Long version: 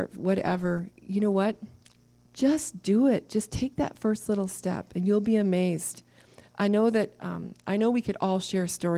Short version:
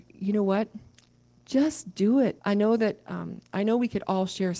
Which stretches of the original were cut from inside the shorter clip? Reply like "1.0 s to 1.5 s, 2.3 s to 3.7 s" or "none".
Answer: 3.3 s to 6.5 s

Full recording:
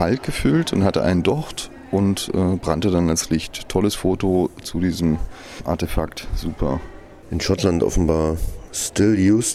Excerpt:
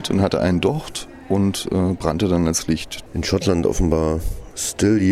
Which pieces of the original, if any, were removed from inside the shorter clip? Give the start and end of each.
3.7 s to 7.2 s

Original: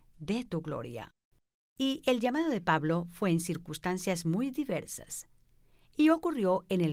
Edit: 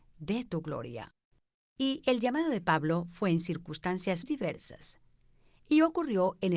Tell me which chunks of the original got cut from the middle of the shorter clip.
4.2 s to 4.5 s

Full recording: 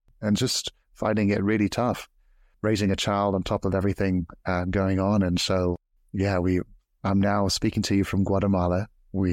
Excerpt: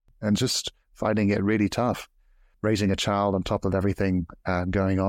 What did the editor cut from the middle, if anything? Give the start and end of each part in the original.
none

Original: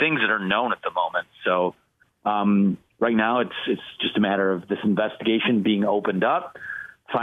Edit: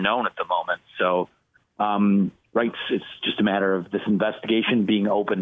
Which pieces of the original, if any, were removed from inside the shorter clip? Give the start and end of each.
3.1 s to 3.4 s

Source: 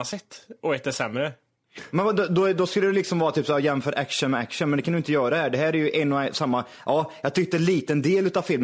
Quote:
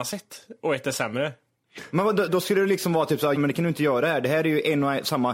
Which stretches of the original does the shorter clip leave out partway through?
2.3 s to 2.5 s, 3.6 s to 4.6 s

